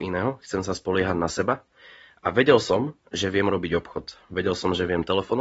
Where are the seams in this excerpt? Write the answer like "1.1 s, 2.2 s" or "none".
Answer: none